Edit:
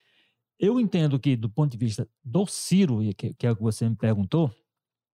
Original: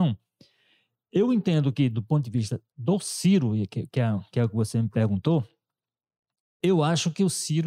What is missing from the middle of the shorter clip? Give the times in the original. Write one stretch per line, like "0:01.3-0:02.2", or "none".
0:03.9-0:04.3